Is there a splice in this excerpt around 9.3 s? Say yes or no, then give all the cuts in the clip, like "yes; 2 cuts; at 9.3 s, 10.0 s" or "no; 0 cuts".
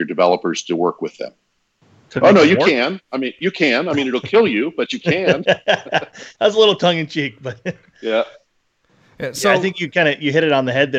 no; 1 cut; at 2.1 s